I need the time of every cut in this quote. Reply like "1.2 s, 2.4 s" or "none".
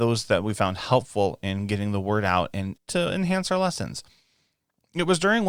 2.8 s